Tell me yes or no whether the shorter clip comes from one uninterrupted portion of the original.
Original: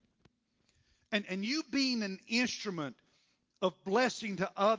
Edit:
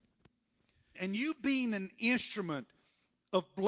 no